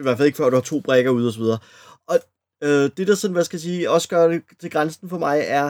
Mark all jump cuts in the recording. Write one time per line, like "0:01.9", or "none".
none